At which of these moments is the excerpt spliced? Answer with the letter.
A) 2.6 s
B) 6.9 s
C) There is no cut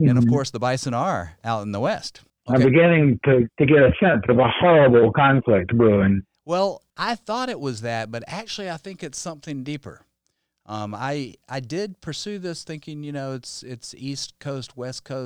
B